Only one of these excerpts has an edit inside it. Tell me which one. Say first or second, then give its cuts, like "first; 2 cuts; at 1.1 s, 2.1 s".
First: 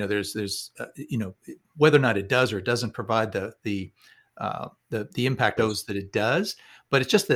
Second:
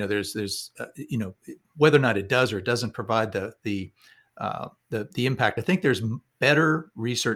first; 1 cut; at 5.6 s